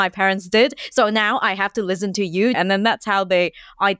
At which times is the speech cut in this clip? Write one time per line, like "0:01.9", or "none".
0:02.5